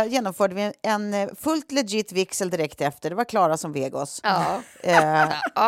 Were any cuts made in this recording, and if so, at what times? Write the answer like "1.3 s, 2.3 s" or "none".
none

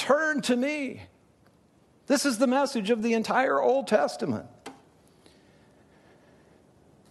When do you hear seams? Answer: none

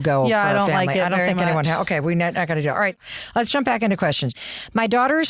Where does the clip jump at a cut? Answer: none

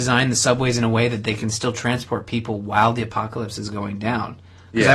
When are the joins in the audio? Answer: none

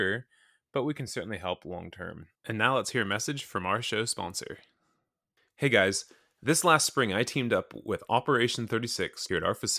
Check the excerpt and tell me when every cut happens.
2.3 s

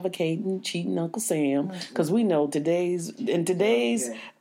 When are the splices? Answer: none

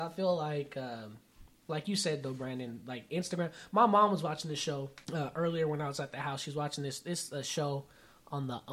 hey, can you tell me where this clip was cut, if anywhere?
5.0 s

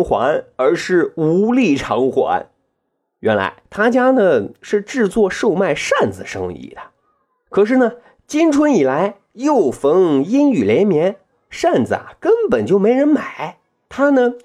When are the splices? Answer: 3.6 s

